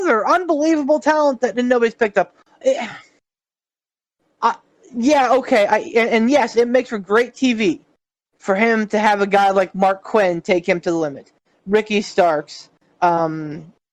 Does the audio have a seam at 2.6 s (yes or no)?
yes